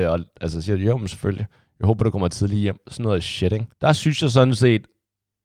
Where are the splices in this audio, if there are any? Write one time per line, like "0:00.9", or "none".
0:03.7